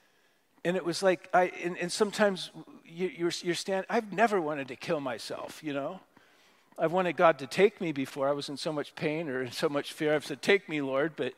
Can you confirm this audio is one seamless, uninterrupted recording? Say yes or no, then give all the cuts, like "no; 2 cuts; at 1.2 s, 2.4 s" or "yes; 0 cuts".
yes; 0 cuts